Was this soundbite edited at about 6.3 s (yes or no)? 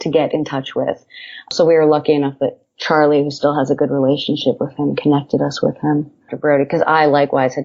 yes